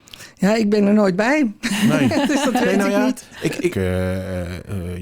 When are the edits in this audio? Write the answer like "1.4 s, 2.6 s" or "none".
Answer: 3.7 s